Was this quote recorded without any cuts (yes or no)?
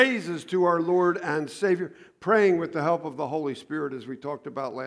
yes